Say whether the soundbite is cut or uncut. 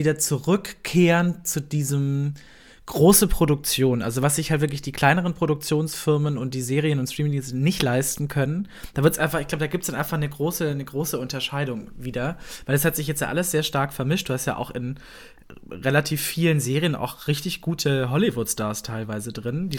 uncut